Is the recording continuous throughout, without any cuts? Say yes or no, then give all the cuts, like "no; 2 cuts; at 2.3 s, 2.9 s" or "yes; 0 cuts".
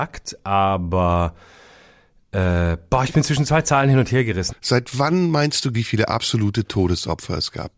no; 2 cuts; at 4.5 s, 5.7 s